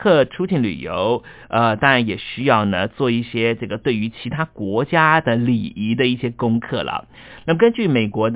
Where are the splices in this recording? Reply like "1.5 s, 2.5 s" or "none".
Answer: none